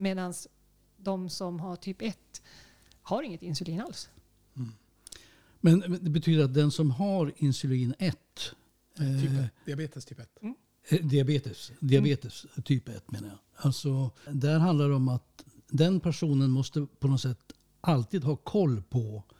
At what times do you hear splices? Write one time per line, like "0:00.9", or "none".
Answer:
0:14.3